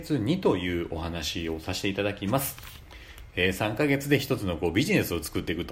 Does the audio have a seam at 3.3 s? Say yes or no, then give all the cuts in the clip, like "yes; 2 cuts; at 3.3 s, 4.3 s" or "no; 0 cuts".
yes; 1 cut; at 3.3 s